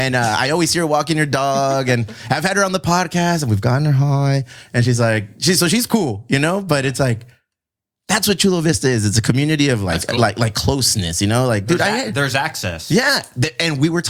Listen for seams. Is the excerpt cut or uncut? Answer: uncut